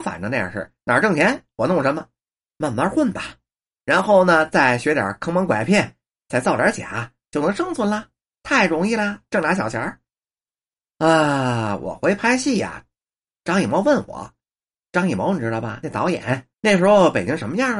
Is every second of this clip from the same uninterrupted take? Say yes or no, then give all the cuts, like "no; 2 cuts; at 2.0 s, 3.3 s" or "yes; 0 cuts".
no; 1 cut; at 16.5 s